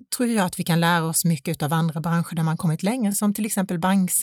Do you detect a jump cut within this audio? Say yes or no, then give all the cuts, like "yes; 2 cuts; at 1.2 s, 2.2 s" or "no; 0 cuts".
no; 0 cuts